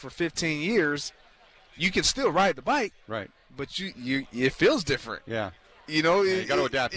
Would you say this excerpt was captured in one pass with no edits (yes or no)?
yes